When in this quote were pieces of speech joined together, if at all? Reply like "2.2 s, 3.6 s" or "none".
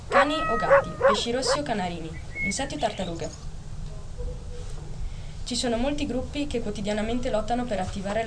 2.3 s